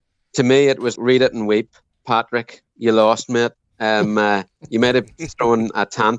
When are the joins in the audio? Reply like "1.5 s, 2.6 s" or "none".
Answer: 0.9 s